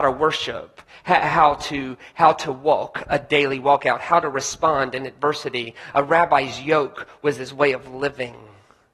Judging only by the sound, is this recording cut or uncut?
uncut